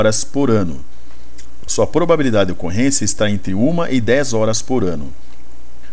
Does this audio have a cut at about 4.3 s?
no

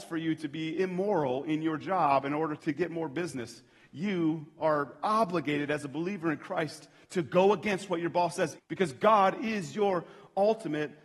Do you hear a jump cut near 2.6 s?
yes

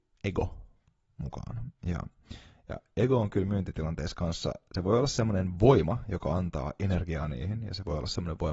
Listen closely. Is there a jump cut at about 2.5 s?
no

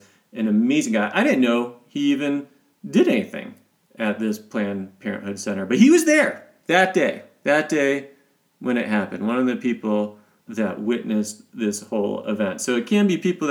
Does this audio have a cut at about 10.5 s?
yes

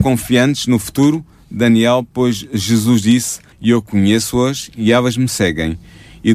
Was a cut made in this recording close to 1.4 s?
no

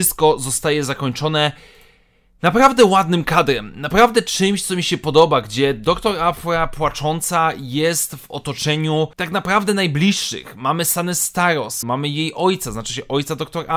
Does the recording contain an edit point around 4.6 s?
no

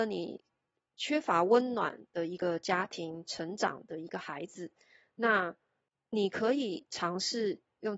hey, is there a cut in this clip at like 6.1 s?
no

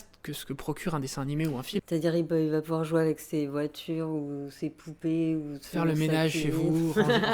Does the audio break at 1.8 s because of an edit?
yes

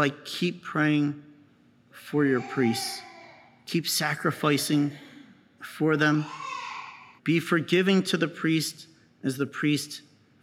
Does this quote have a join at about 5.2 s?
no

